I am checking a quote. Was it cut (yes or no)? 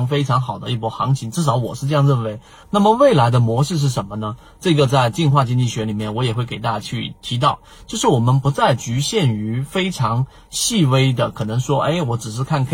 yes